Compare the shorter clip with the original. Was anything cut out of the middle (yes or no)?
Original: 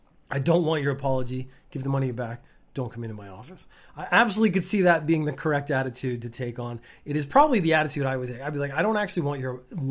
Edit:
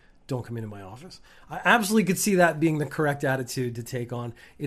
no